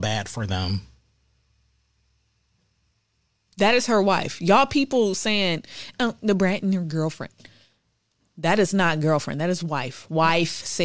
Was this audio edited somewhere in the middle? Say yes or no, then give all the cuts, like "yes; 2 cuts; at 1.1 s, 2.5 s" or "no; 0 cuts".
no; 0 cuts